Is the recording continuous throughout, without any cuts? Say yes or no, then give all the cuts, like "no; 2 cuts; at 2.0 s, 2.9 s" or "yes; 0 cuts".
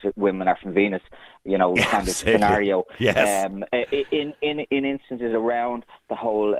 yes; 0 cuts